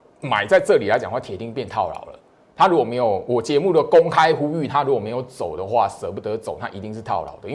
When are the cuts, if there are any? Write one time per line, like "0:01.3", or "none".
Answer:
none